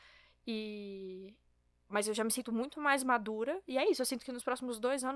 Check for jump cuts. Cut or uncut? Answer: uncut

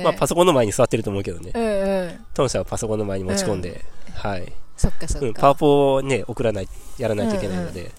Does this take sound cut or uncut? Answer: uncut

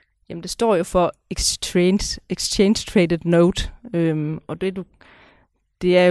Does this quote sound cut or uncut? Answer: uncut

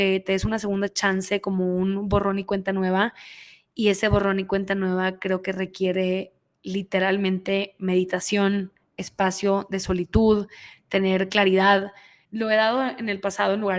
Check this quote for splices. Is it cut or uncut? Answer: cut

